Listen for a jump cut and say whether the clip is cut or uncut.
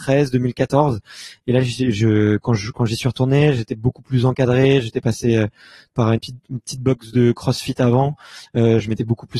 cut